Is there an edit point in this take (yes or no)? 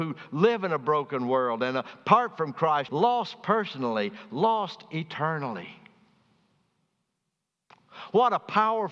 yes